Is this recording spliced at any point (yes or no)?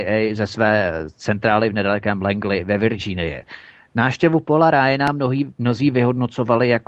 no